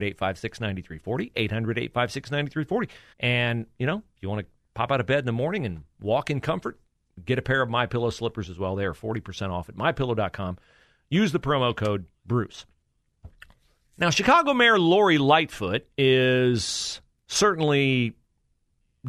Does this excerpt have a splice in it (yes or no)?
yes